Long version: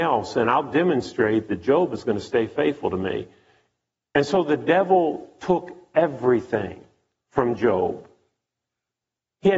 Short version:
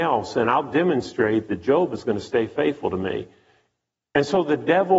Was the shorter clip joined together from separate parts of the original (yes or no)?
no